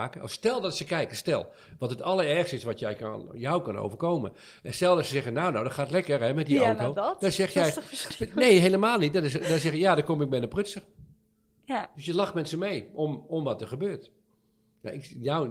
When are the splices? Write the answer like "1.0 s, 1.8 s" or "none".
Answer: none